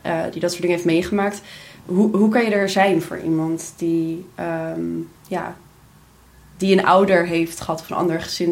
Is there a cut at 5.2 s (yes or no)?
yes